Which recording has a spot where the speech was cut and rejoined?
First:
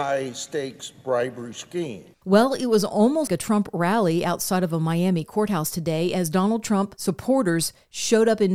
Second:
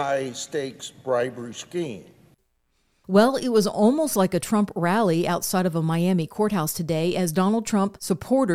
first; 2 cuts; at 2.1 s, 3.3 s

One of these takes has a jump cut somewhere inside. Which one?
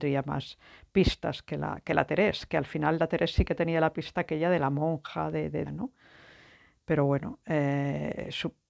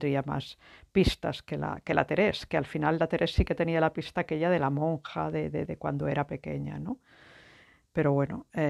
first; 1 cut; at 5.7 s

